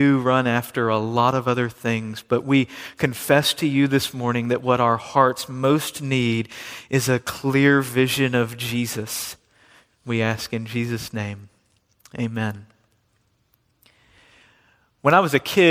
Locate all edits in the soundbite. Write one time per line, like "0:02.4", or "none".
0:10.0